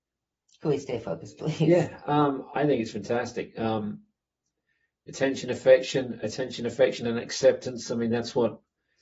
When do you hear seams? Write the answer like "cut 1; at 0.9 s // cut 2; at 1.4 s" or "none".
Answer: none

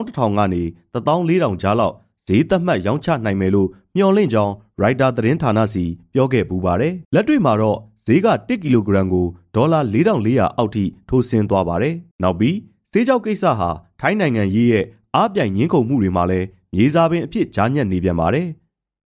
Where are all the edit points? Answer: cut 1; at 7.0 s // cut 2; at 12.1 s

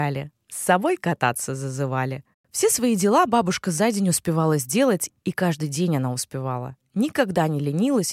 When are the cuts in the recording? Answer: cut 1; at 2.3 s

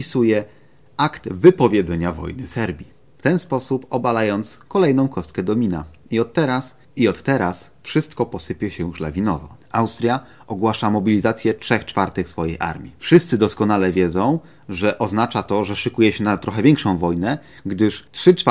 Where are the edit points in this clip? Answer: none

